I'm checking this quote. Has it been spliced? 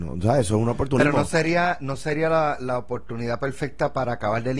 no; 0 cuts

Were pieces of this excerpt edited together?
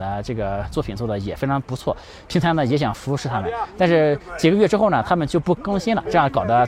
no; 0 cuts

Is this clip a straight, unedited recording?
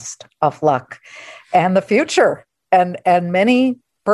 yes; 0 cuts

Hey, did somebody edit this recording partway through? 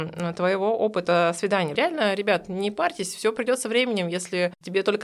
yes; 1 cut; at 1.7 s

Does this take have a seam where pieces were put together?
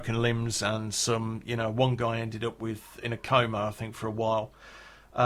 no; 0 cuts

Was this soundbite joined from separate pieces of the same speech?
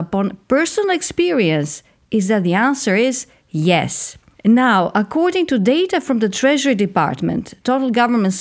yes; 1 cut; at 4.3 s

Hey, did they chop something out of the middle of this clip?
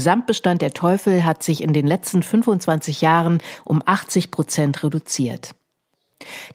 no; 0 cuts

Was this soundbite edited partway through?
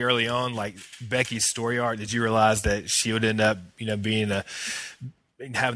no; 0 cuts

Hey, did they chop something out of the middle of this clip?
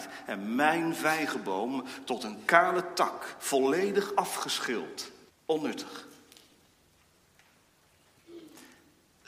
yes; 1 cut; at 5.3 s

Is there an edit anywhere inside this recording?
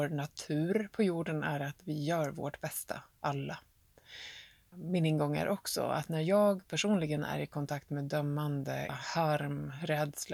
yes; 2 cuts; at 4.7 s, 8.9 s

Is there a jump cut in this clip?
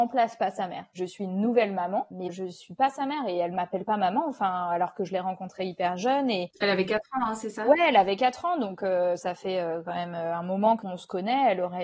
no; 0 cuts

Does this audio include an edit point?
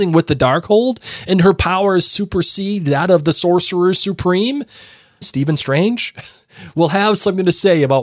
yes; 1 cut; at 5.2 s

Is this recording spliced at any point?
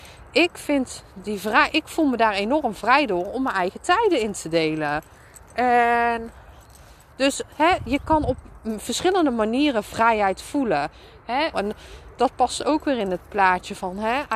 yes; 1 cut; at 11.5 s

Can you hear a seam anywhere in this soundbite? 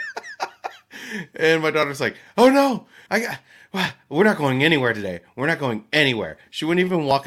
yes; 1 cut; at 3.1 s

